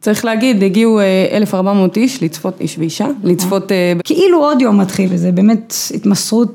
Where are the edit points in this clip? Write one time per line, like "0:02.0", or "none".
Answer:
0:04.0
0:05.1